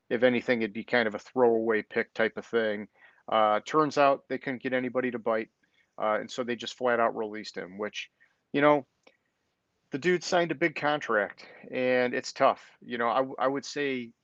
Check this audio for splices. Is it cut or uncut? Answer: uncut